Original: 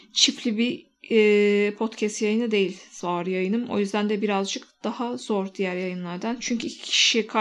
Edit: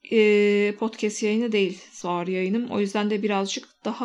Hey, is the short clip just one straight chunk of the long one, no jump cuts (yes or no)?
yes